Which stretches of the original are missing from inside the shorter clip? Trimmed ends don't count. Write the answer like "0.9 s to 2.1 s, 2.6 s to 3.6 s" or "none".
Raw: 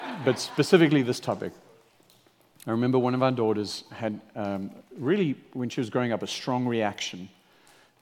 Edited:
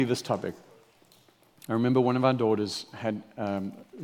none